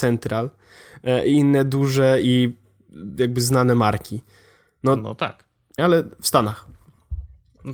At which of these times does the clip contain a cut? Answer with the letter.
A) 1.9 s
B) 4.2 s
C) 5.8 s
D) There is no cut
C